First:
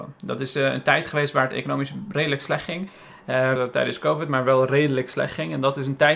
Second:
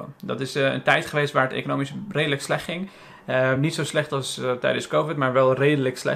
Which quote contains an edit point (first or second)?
first